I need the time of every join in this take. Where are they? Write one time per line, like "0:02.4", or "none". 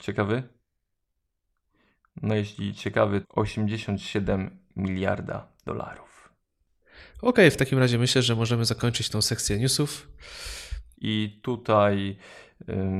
0:03.2
0:10.9